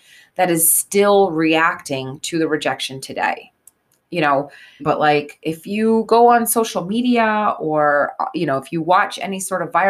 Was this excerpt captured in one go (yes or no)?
no